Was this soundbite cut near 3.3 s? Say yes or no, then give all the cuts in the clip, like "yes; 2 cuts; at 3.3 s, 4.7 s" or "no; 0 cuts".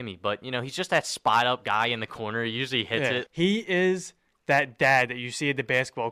yes; 1 cut; at 3.3 s